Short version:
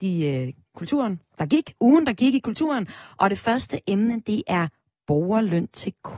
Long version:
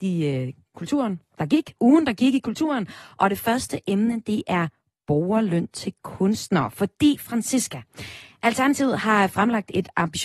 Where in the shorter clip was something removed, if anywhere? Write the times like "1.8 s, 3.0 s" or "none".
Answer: none